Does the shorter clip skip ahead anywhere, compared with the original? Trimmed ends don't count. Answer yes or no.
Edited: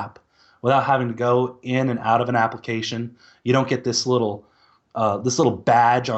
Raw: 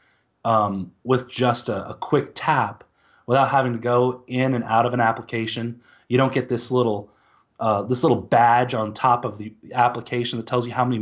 no